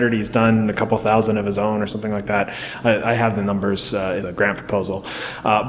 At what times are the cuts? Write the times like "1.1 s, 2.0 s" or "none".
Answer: 4.2 s